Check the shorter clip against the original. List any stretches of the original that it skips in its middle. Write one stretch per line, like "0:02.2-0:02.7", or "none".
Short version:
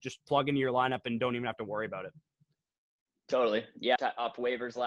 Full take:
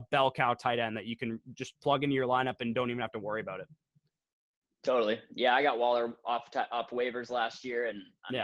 0:05.5-0:06.5